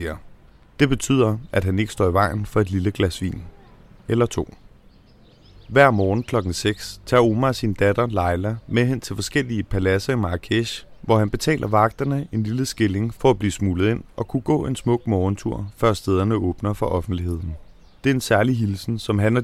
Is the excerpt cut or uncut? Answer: cut